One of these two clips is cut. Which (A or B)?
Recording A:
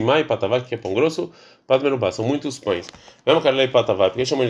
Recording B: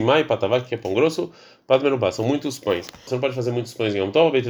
B